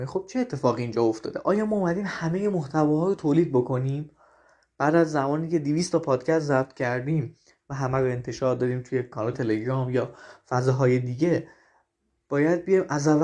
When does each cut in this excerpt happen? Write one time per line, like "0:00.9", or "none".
0:09.3

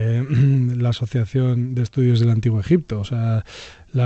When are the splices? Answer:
none

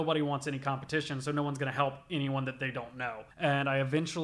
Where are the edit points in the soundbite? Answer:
0:03.3

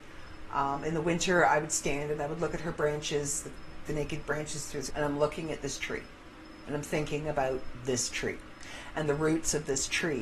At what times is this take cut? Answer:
0:04.9

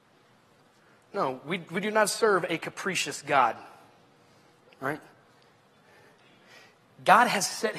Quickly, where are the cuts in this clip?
none

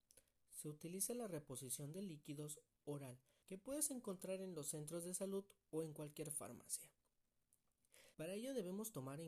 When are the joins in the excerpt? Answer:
0:03.4
0:08.1

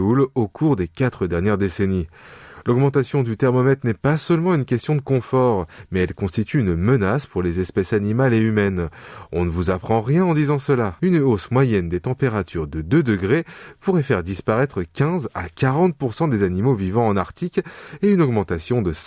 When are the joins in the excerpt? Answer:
0:11.0

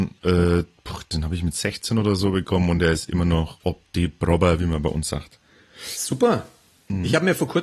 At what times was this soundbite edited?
none

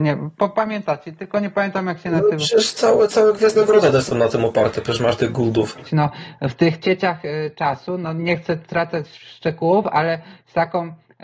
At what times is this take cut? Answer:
0:02.7
0:05.8

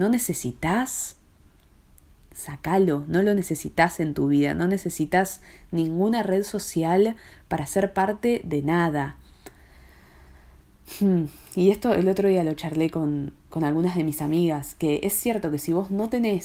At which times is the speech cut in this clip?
none

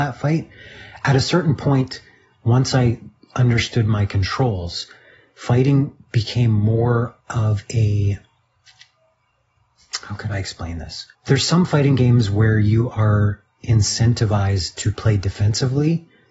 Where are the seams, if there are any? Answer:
0:07.2
0:11.1

